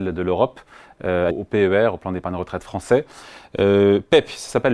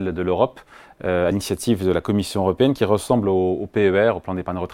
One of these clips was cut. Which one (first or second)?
first